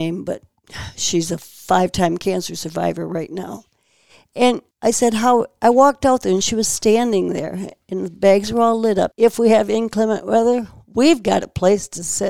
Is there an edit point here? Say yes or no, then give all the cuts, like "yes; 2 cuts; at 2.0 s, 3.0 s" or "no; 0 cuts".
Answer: yes; 2 cuts; at 4.7 s, 9.1 s